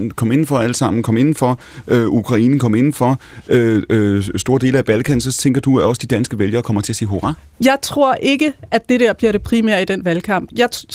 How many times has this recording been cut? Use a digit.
0